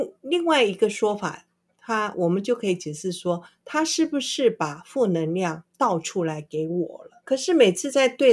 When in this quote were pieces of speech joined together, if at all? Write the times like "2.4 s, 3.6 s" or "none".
none